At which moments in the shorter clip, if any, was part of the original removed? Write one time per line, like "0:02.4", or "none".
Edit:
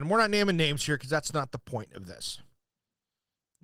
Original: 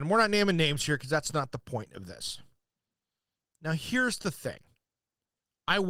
none